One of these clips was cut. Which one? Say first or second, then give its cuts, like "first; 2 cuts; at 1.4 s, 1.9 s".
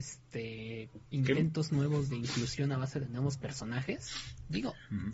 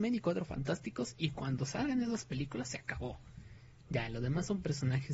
first; 1 cut; at 1.1 s